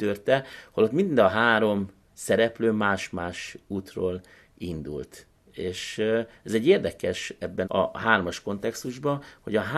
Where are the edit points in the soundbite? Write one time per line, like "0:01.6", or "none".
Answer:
0:07.6